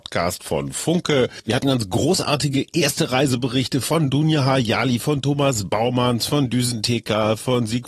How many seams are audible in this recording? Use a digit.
2